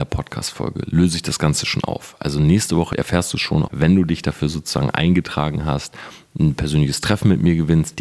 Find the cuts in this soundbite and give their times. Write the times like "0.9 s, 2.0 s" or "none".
3.7 s